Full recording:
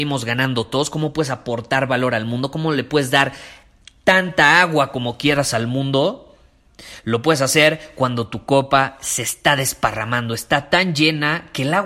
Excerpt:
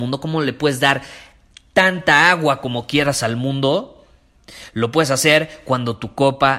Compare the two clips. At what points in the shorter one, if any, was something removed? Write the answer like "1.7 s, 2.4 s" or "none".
none